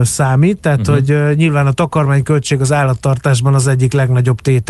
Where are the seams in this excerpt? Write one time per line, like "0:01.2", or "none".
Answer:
none